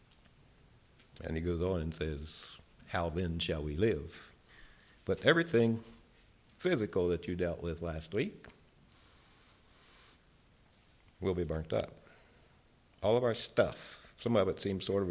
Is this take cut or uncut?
uncut